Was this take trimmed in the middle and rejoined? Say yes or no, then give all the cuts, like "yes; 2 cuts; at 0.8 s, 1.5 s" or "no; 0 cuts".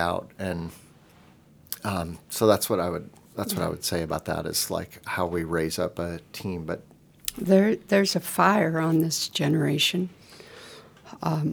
no; 0 cuts